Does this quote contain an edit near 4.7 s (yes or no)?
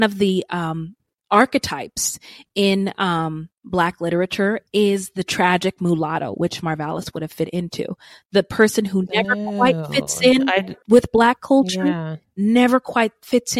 yes